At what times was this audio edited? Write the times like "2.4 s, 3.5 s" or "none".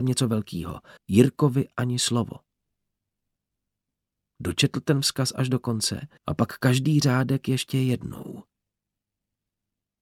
1.0 s, 6.2 s